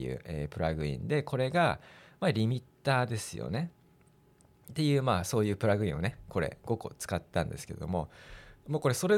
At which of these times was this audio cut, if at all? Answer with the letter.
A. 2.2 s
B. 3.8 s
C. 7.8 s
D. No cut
D